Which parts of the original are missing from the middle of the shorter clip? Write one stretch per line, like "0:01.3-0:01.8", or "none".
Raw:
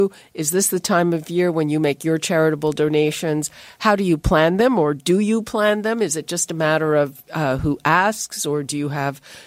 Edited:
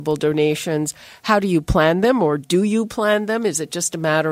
none

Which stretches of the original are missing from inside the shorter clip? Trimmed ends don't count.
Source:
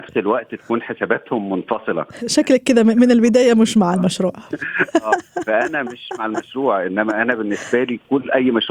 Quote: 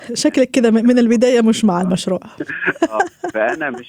none

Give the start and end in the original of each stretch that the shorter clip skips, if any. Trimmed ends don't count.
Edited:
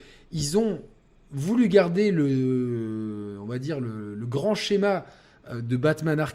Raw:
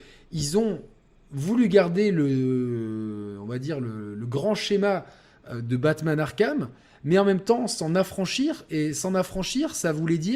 none

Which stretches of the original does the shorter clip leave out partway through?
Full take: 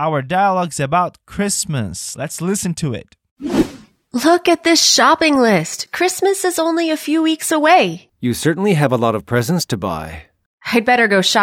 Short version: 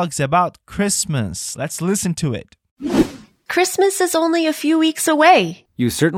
0:04.1-0:05.9

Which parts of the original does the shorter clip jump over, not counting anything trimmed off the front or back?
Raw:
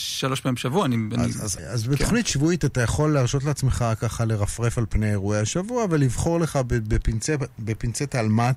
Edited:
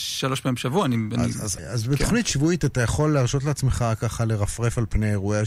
none

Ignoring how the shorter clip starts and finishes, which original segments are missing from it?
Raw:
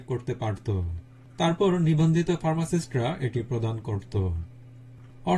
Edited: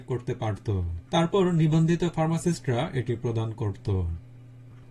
0:01.1-0:01.3

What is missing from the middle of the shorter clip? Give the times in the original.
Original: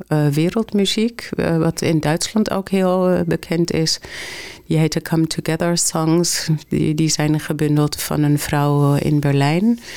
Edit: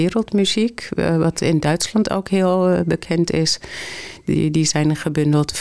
0:04.6-0:06.6

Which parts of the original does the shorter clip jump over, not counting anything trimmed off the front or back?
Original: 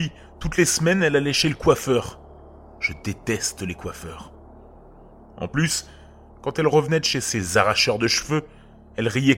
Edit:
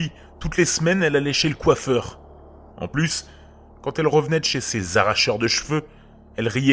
0:02.7-0:05.3

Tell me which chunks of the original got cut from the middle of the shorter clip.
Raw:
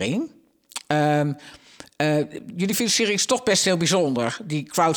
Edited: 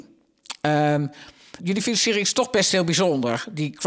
0:01.8-0:02.5

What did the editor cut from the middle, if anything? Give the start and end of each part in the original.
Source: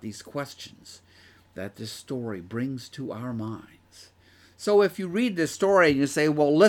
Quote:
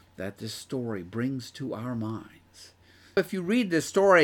0:04.6-0:04.8

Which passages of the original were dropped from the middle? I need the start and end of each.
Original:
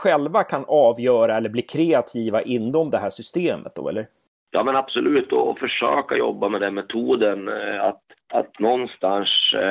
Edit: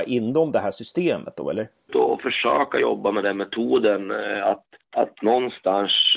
0:04.3-0:05.3

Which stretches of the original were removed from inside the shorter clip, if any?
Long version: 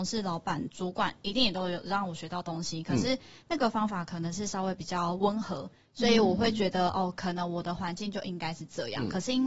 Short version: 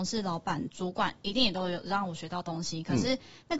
none

